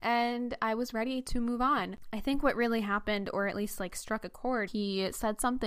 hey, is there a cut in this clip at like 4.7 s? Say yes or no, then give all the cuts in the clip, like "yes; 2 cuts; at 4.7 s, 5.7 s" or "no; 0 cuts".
yes; 1 cut; at 4.7 s